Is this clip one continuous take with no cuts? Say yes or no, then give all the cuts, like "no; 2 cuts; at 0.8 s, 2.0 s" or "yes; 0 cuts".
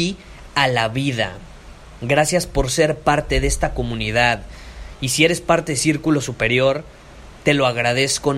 yes; 0 cuts